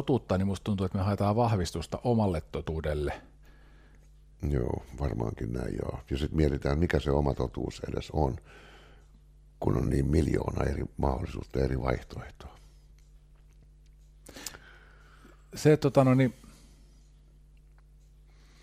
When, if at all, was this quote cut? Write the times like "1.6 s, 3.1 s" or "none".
none